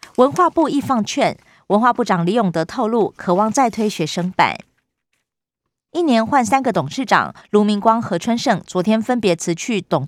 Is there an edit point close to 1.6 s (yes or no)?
no